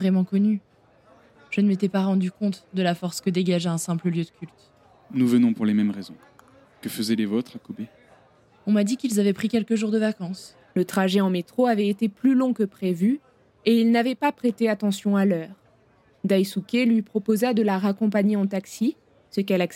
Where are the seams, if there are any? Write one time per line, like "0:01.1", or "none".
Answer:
0:06.6
0:10.7